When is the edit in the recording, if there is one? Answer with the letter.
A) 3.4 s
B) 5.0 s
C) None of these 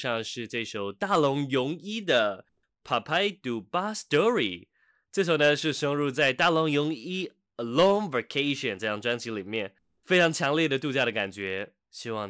A